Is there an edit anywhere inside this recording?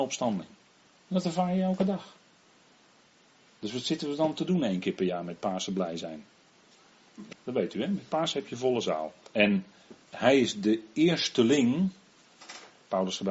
yes; 2 cuts; at 7.3 s, 9.3 s

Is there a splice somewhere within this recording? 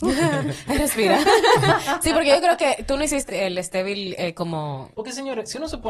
yes; 2 cuts; at 3.3 s, 4.9 s

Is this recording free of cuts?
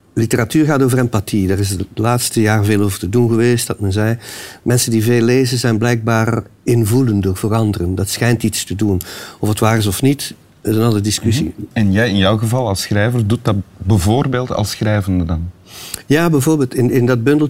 no; 1 cut; at 11.7 s

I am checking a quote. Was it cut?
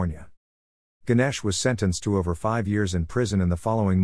no; 0 cuts

